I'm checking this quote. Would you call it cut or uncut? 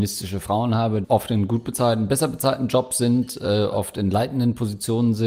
cut